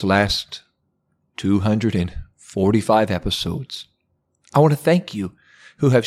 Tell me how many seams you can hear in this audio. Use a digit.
0